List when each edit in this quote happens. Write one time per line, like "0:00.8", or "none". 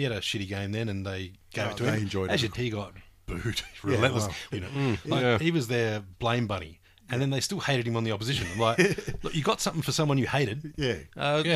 0:02.5
0:04.5